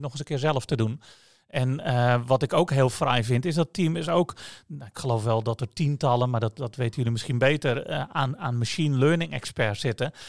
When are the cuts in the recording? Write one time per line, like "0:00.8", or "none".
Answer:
none